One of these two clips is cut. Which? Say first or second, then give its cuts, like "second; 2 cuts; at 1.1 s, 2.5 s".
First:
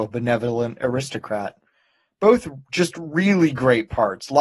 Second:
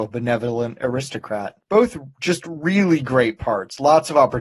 second; 1 cut; at 1.6 s